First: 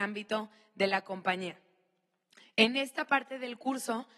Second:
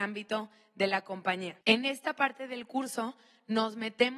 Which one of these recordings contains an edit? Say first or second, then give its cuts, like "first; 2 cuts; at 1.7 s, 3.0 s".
second; 1 cut; at 1.6 s